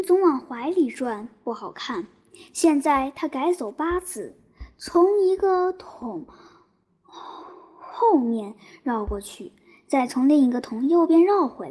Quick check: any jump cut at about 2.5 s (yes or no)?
no